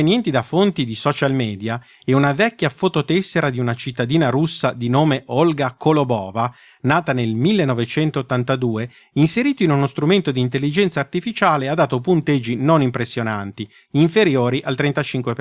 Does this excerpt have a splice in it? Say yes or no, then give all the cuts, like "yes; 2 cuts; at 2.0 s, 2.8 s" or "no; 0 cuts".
no; 0 cuts